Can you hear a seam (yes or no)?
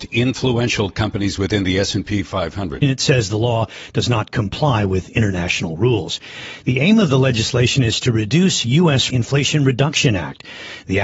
yes